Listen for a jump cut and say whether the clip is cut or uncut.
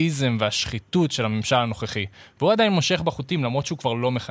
uncut